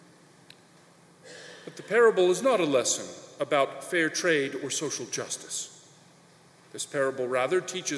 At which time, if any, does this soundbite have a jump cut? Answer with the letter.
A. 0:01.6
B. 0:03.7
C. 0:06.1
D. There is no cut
D